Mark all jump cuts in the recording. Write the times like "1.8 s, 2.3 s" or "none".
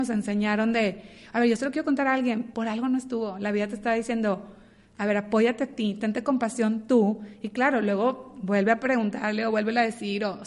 2.5 s